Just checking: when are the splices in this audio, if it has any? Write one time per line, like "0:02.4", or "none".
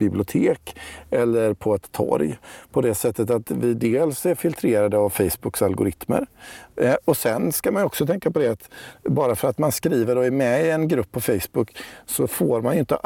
0:06.7